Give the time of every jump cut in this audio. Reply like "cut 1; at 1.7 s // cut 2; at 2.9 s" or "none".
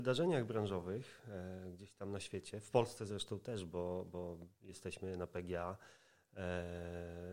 none